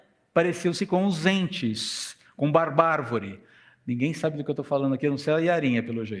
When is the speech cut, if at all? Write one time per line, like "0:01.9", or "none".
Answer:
none